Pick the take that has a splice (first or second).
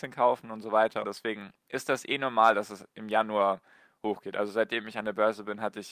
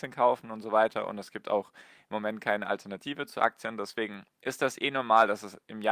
first